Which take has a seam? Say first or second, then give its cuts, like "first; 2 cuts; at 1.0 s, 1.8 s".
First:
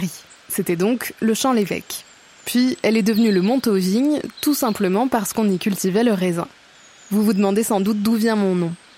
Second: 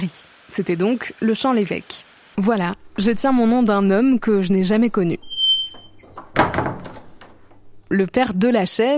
second; 1 cut; at 2.3 s